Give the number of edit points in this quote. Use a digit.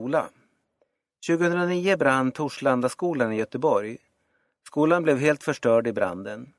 0